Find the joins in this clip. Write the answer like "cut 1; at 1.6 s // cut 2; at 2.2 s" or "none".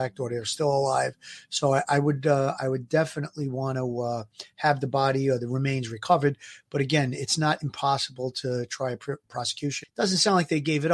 cut 1; at 9.8 s